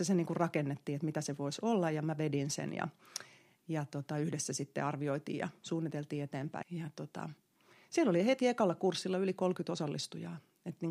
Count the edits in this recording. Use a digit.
1